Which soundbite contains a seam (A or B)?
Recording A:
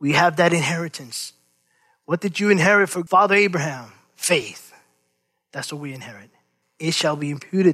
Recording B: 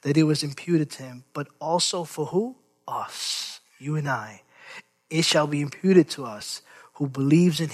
A